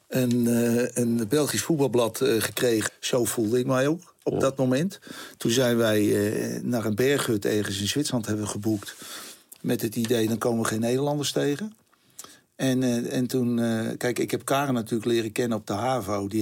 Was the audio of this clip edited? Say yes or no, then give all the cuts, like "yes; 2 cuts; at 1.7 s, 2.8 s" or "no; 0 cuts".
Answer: yes; 1 cut; at 2.9 s